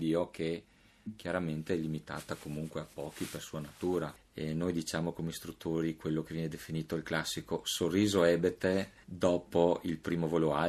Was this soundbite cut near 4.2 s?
yes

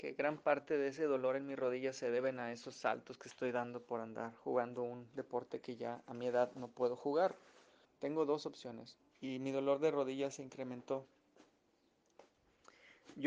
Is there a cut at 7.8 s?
yes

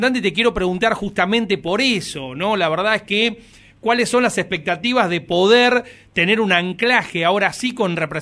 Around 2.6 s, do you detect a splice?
no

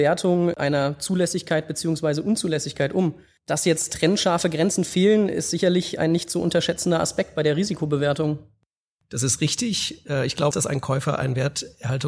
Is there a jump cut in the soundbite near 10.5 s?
yes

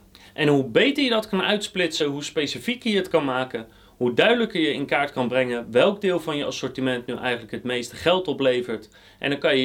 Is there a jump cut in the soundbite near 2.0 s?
no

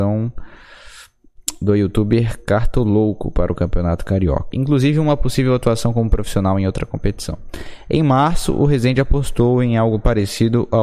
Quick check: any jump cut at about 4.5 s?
yes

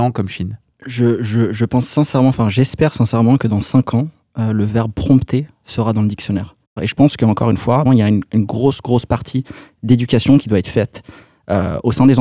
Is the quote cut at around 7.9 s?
yes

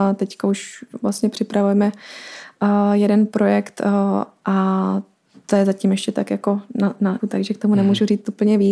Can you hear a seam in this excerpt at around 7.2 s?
yes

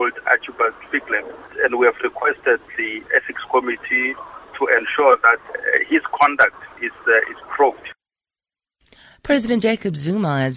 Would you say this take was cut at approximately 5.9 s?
no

